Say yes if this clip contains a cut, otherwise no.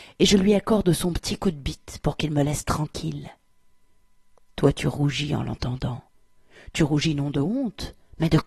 no